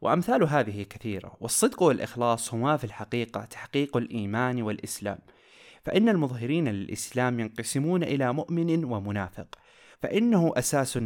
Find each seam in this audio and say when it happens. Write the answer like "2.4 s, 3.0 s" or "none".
9.9 s